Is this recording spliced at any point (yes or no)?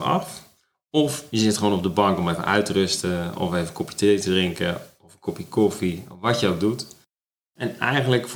no